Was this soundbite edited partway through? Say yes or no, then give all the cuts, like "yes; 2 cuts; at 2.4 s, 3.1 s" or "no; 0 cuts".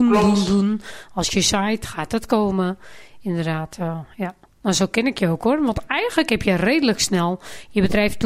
no; 0 cuts